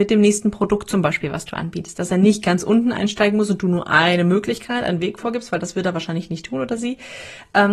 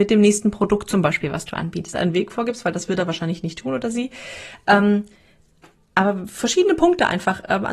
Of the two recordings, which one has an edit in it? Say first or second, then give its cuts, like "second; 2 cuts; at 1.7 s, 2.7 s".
second; 1 cut; at 1.9 s